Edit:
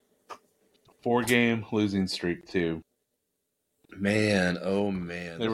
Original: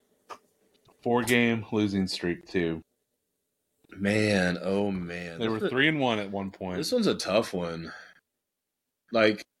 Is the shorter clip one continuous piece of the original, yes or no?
yes